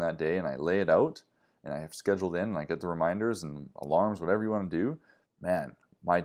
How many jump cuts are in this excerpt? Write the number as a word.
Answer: one